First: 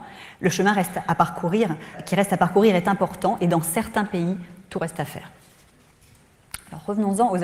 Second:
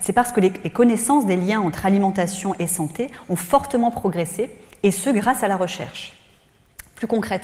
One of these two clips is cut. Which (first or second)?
first